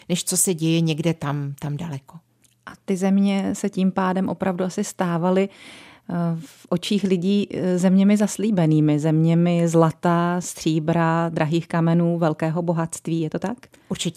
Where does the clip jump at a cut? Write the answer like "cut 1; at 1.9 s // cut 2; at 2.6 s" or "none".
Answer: none